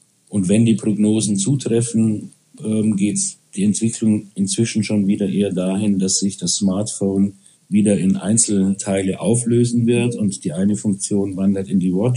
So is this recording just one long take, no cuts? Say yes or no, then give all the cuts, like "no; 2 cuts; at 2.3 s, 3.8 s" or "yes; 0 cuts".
yes; 0 cuts